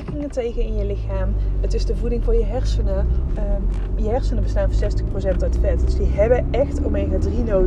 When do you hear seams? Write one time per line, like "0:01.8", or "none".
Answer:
0:03.3